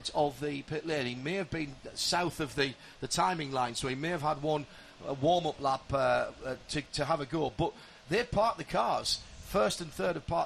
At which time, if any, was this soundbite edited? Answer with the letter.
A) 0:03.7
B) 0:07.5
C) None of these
C